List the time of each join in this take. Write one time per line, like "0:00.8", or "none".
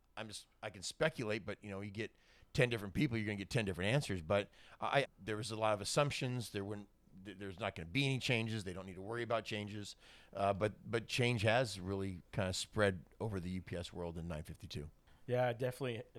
0:05.0